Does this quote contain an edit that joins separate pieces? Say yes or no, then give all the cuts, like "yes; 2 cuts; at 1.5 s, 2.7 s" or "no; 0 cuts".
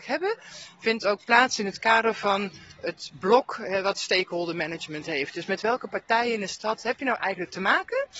no; 0 cuts